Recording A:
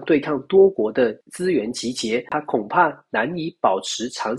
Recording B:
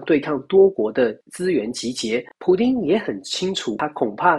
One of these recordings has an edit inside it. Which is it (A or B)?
A